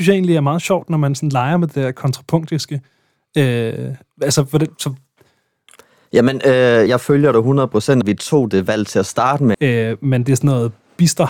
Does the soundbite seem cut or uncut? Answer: cut